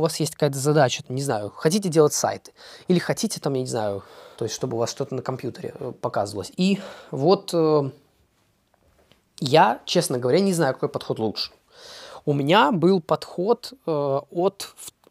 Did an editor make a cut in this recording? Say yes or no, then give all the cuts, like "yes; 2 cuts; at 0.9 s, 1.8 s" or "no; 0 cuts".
yes; 3 cuts; at 1.0 s, 4.4 s, 6.5 s